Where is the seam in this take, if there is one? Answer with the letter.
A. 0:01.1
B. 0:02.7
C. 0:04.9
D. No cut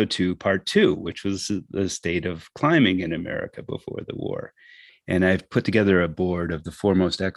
C